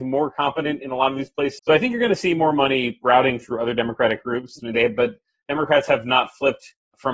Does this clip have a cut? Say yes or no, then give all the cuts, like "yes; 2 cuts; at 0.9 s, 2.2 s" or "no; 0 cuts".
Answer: yes; 2 cuts; at 1.6 s, 4.6 s